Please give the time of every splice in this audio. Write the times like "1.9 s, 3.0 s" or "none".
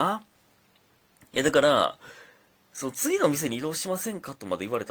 none